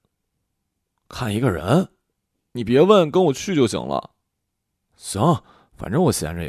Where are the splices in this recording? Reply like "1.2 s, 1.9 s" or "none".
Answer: none